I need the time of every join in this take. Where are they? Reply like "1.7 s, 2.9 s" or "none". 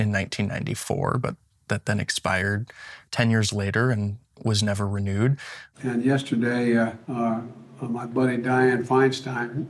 5.7 s, 7.0 s